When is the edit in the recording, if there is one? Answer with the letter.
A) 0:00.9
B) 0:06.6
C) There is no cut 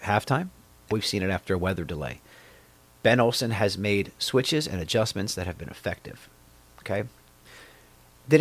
A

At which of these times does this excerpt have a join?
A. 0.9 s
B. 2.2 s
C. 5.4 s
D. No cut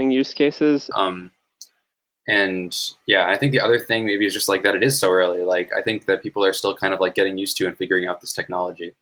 A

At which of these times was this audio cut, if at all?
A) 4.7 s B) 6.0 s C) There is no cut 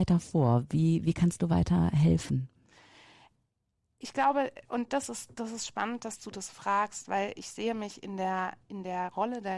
C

